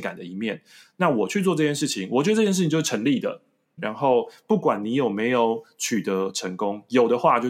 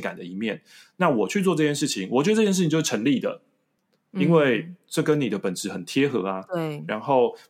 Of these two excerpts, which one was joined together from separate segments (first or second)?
first